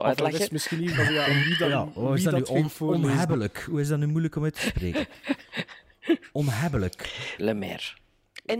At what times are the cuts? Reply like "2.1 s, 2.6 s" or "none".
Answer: 0.9 s, 7.4 s